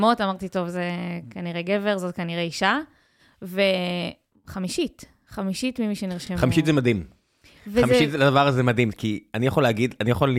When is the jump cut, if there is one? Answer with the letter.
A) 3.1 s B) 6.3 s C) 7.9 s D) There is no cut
D